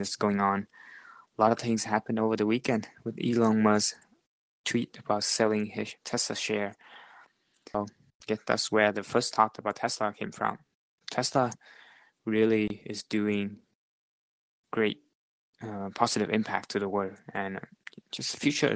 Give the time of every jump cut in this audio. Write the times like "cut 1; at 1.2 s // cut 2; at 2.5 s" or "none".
cut 1; at 11.0 s